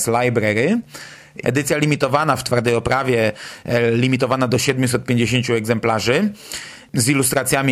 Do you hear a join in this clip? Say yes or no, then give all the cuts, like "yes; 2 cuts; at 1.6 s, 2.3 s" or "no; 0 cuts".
yes; 1 cut; at 1.4 s